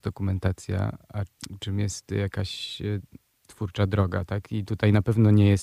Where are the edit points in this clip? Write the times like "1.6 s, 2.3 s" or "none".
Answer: none